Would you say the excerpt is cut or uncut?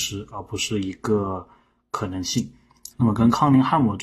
cut